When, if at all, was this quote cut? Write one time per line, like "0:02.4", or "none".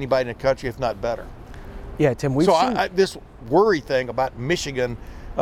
none